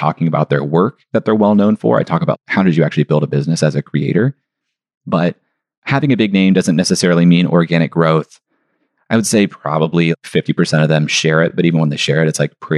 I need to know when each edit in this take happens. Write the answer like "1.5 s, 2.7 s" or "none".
none